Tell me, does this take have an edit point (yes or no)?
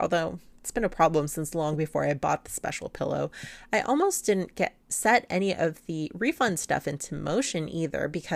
no